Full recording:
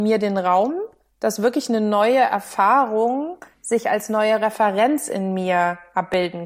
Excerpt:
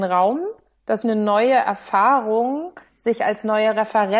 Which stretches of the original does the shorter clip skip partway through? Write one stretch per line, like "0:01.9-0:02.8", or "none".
0:01.4-0:01.7